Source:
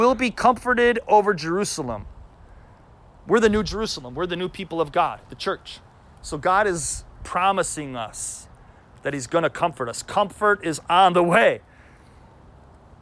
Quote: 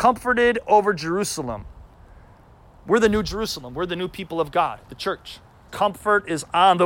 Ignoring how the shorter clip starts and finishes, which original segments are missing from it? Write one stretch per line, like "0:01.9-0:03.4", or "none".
0:06.1-0:10.0

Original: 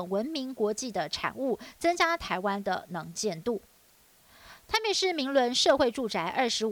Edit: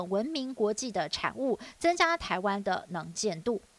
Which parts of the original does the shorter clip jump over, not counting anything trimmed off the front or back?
none

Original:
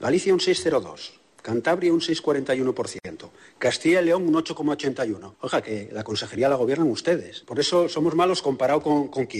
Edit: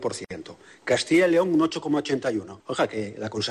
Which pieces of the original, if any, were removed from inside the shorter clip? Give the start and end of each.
none

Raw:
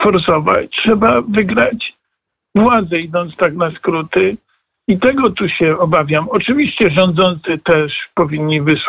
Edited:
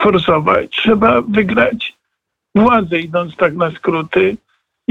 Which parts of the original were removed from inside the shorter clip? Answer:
none

